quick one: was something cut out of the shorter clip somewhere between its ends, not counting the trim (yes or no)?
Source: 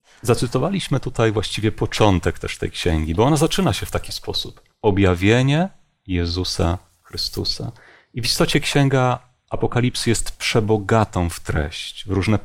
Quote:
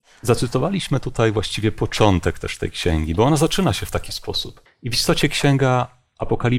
yes